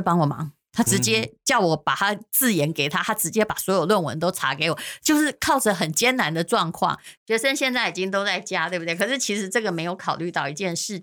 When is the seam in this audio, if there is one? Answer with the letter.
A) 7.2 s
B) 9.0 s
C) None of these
A